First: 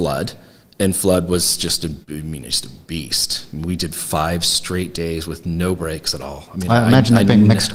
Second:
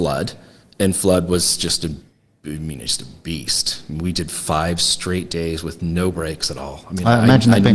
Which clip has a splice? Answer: first; 1 cut; at 2.0 s

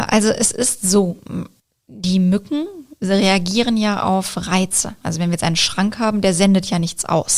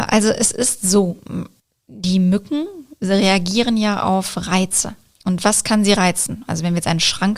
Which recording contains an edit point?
first; 1 cut; at 5.0 s

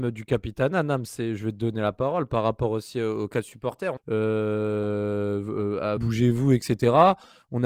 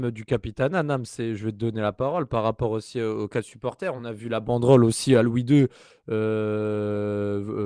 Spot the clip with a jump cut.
first; 2 cuts; at 4.0 s, 6.0 s

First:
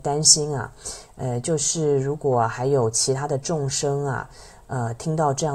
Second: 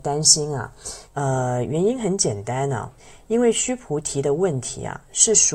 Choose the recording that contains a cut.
second; 1 cut; at 1.1 s

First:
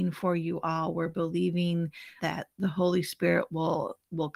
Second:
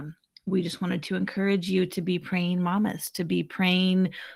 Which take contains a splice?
first; 1 cut; at 2.2 s

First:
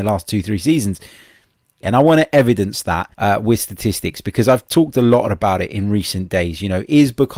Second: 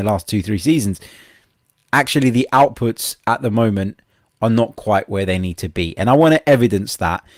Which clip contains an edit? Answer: first; 2 cuts; at 1.8 s, 3.1 s

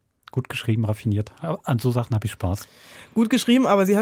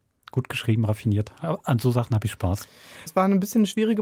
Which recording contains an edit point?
second; 1 cut; at 3.1 s

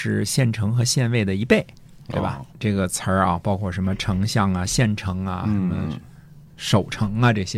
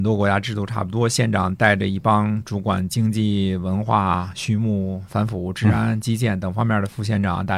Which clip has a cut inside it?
first; 1 cut; at 2.5 s

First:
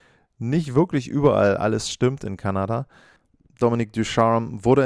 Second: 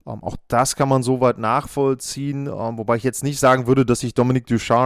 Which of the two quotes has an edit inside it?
first; 1 cut; at 3.6 s

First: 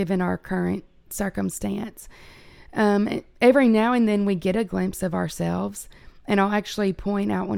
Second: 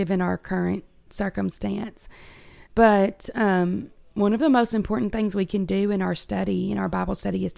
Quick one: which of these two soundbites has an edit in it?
second; 1 cut; at 2.7 s

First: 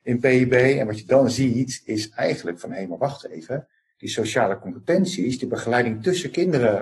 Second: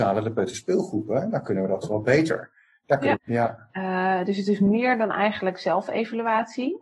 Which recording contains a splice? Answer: second; 1 cut; at 3.2 s

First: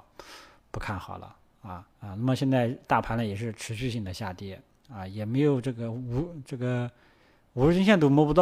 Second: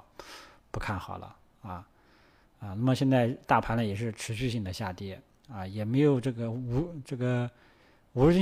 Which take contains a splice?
first; 1 cut; at 1.9 s

